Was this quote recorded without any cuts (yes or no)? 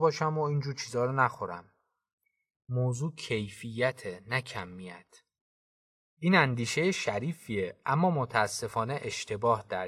no